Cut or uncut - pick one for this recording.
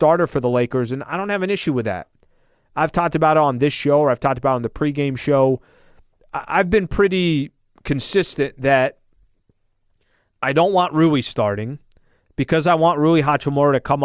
uncut